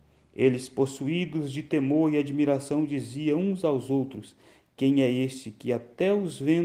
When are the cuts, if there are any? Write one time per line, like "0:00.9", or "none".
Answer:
none